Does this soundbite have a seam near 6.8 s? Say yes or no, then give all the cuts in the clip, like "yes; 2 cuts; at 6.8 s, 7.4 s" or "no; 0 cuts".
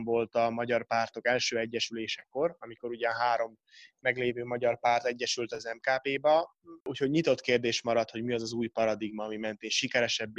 yes; 1 cut; at 6.8 s